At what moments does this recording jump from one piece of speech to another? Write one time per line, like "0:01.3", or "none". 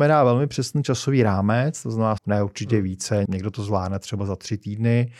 0:02.2
0:03.2